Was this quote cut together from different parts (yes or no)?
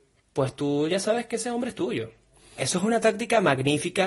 yes